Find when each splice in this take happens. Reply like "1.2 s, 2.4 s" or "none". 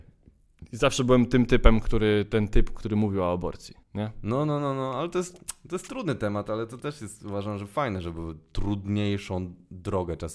3.8 s